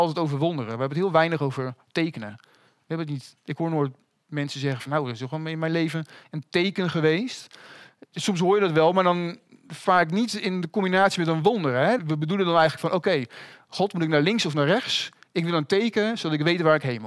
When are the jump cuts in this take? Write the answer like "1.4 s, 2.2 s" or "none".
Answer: 12.0 s